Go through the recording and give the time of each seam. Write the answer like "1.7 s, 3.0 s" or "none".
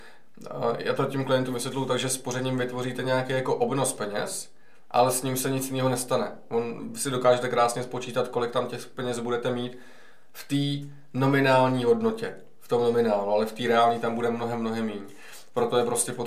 none